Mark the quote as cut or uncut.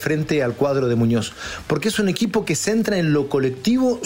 cut